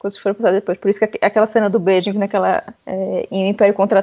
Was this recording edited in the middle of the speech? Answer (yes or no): yes